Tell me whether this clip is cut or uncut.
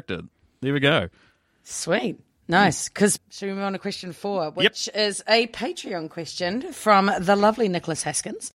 cut